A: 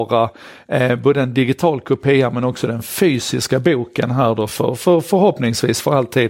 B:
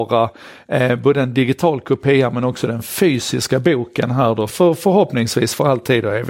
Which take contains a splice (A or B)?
B